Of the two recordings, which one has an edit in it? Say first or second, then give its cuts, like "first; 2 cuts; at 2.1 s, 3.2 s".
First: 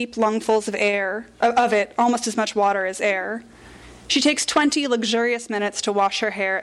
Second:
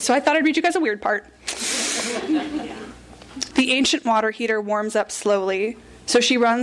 second; 1 cut; at 3.5 s